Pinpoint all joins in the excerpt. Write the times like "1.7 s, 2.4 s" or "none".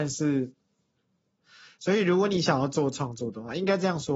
1.4 s